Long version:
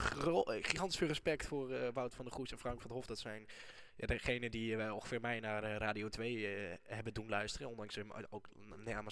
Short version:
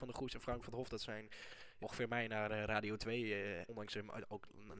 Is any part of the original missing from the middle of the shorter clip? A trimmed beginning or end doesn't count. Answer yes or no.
yes